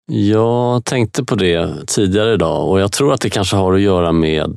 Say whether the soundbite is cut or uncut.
uncut